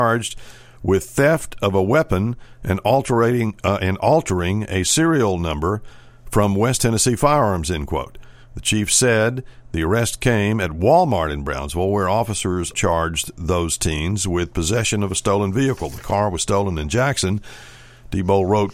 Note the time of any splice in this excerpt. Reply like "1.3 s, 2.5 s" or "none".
12.7 s